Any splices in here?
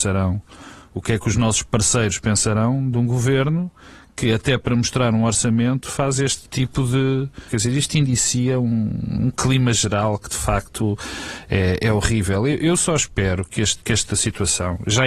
yes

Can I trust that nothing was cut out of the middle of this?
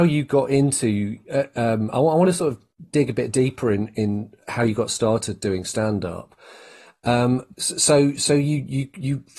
yes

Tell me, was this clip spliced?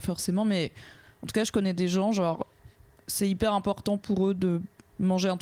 no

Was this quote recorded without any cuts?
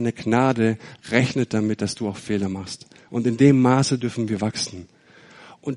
no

